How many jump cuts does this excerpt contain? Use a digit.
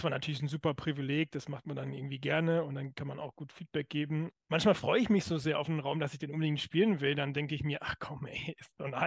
1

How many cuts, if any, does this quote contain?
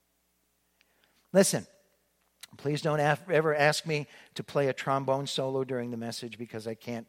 0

